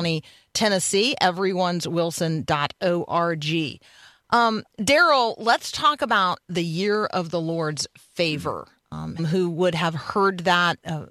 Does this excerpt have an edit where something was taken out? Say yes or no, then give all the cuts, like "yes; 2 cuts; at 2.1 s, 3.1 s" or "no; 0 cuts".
yes; 1 cut; at 9.2 s